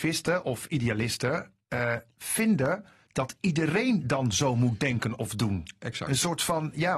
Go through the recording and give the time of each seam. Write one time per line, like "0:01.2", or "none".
none